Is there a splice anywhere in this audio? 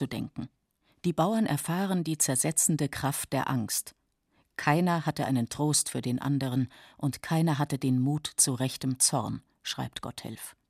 no; 0 cuts

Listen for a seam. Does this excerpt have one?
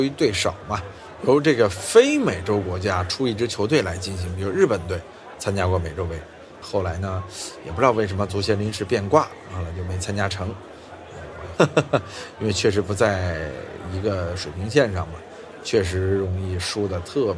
yes; 2 cuts; at 6.6 s, 11.6 s

